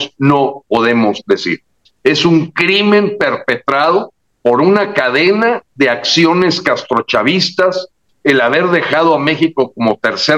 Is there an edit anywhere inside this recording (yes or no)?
yes